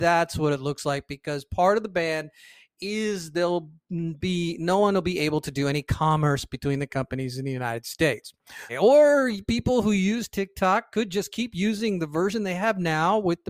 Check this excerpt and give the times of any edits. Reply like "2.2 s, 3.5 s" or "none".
8.7 s